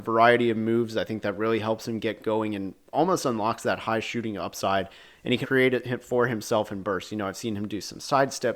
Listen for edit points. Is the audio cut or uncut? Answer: cut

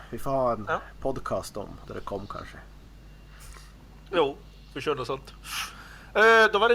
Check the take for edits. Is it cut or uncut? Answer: cut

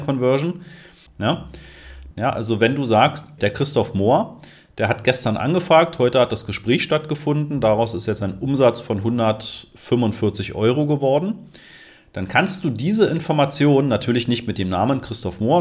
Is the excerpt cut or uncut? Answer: cut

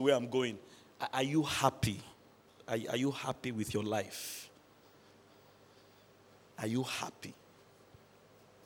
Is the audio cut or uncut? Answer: uncut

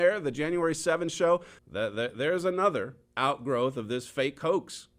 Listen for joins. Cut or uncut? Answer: cut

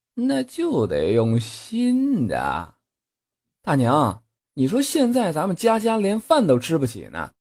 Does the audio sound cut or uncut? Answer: cut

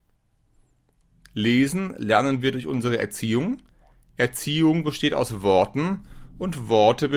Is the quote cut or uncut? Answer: uncut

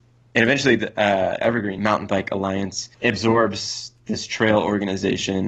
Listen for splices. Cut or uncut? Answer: cut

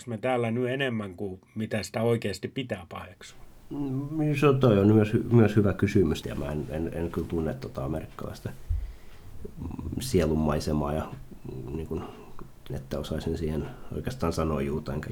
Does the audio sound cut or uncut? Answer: cut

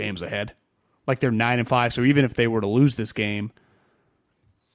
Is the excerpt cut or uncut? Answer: uncut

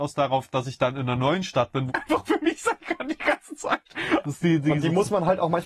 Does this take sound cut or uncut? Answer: cut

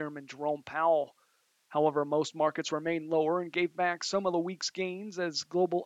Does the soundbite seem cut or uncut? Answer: uncut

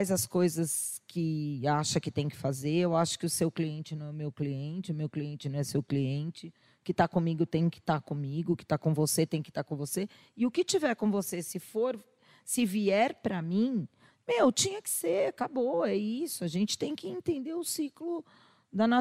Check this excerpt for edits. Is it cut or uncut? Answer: cut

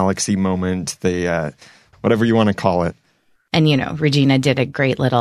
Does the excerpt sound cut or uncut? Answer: cut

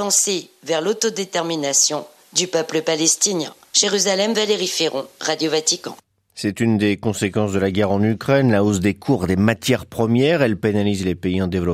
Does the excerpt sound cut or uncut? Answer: uncut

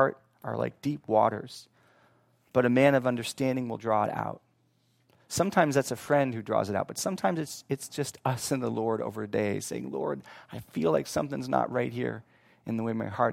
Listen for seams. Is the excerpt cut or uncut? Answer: uncut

